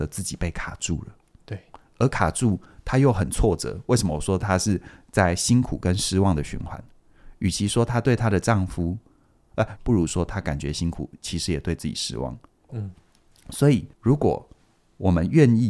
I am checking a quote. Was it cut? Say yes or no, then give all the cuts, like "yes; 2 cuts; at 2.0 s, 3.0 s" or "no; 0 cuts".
yes; 3 cuts; at 9.8 s, 12.7 s, 13.9 s